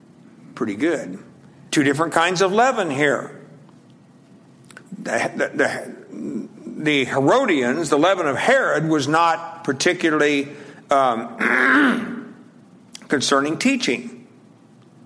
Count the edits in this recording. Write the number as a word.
two